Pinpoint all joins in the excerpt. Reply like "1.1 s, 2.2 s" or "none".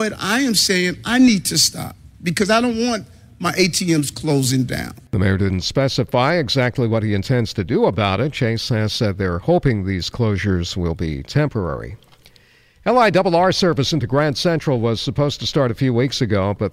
none